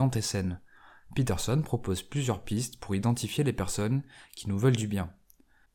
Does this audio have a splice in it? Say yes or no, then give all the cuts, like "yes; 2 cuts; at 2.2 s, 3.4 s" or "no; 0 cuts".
no; 0 cuts